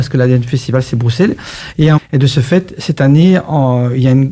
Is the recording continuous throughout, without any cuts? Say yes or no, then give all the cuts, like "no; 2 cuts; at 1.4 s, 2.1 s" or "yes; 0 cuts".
no; 1 cut; at 2.0 s